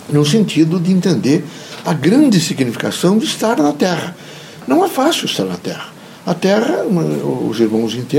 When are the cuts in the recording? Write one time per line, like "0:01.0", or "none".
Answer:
none

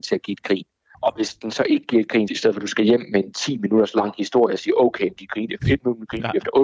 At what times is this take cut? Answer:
0:00.9
0:02.3

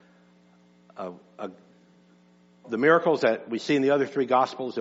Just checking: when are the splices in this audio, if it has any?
0:02.6

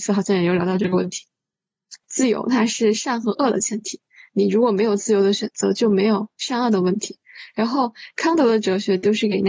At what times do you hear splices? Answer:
0:02.0

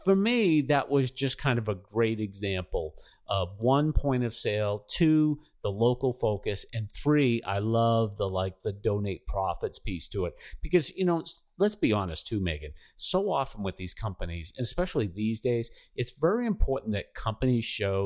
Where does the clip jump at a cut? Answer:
none

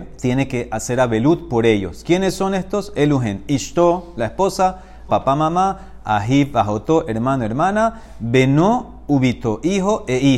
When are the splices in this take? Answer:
0:05.1

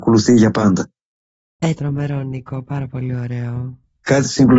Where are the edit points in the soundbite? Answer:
0:01.8

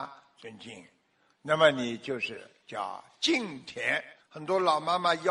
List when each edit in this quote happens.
0:04.2

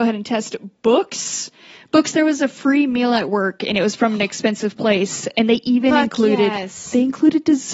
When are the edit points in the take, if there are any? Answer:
none

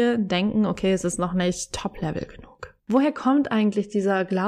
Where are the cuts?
0:02.8

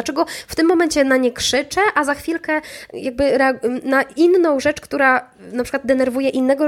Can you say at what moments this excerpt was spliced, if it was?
0:02.9

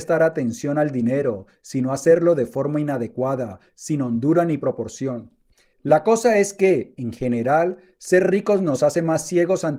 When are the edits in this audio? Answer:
0:05.7

